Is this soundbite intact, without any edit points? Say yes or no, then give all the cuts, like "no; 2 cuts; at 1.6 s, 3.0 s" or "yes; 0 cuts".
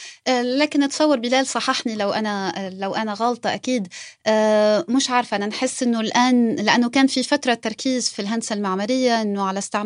no; 1 cut; at 8.1 s